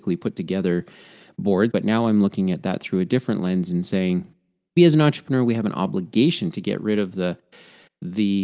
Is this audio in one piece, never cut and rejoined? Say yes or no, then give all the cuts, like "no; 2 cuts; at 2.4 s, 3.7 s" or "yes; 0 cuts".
no; 2 cuts; at 1.7 s, 4.8 s